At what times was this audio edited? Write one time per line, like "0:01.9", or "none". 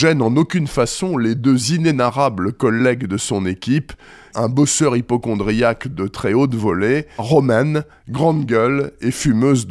0:04.3
0:07.2